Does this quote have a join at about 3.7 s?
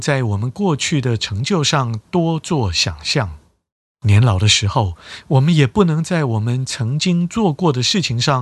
no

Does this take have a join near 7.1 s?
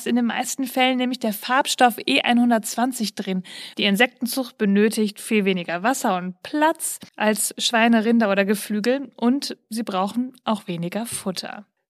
yes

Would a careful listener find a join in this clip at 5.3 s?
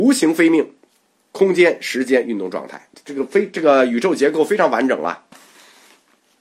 yes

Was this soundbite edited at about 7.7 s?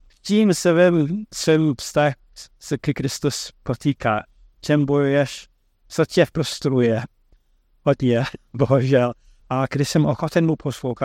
no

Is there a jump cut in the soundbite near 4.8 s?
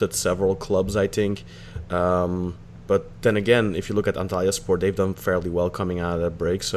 no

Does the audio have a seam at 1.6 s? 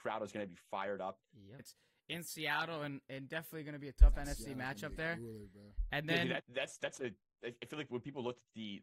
yes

